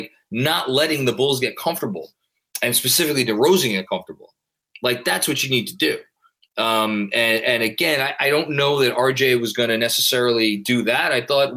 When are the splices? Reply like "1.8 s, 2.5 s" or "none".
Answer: none